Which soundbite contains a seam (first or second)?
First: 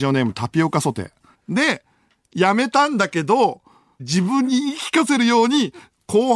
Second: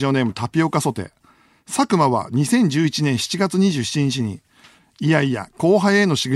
first